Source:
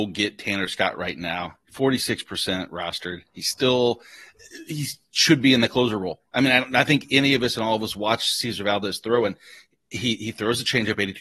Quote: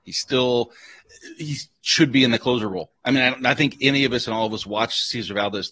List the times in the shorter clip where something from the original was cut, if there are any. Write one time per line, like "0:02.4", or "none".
none